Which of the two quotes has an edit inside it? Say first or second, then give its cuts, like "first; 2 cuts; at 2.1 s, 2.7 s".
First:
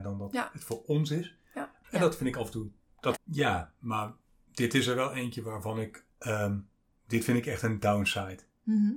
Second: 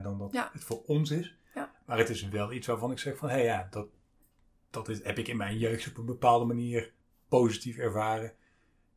first; 3 cuts; at 1.8 s, 3.1 s, 6.1 s